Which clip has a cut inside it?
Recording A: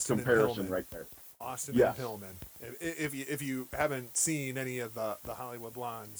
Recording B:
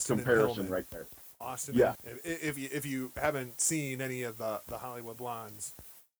B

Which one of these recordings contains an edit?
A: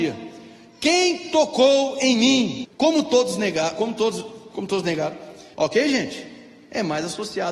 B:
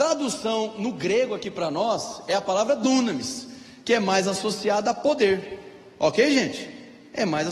A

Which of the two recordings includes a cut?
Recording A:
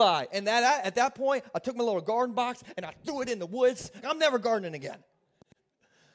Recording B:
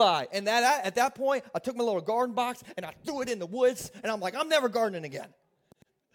A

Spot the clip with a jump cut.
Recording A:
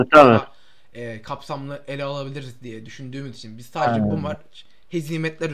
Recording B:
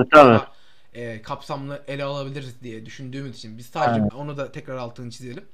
B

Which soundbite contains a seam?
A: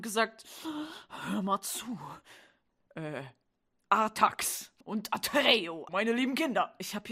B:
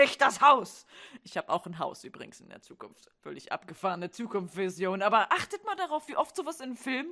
A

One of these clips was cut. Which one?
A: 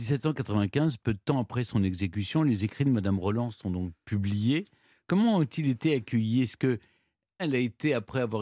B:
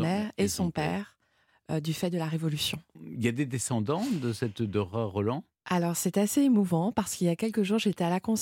A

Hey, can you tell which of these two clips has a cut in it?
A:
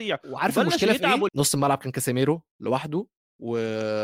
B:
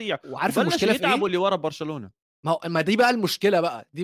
A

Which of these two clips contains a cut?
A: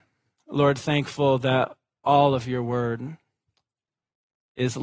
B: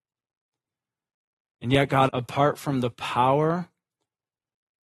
B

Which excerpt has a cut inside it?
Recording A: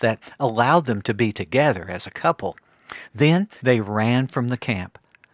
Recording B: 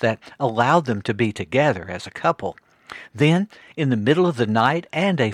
A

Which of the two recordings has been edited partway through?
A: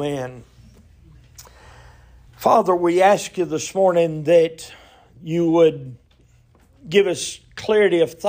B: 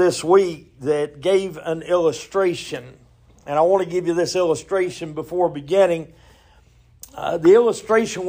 A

